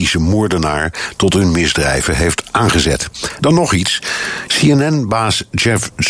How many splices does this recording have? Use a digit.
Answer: 2